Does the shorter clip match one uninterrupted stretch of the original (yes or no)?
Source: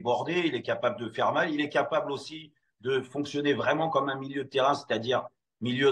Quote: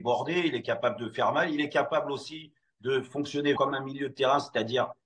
no